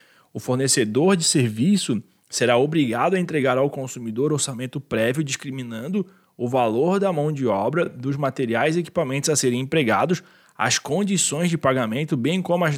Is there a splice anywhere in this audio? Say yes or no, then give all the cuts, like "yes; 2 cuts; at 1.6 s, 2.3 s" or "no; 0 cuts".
no; 0 cuts